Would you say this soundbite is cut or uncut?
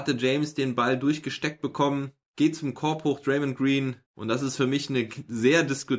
cut